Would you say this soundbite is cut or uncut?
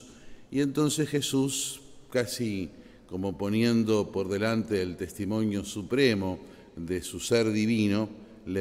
uncut